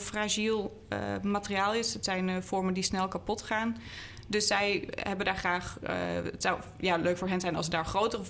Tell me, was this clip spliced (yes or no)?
no